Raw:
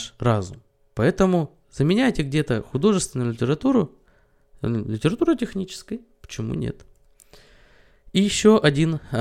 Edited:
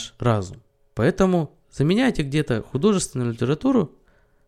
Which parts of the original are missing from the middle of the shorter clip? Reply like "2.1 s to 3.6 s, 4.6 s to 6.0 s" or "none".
none